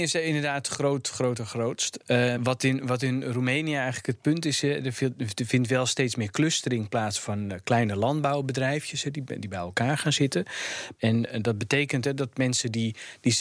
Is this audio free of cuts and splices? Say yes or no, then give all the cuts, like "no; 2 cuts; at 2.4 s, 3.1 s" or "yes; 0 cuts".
no; 2 cuts; at 2.4 s, 10.9 s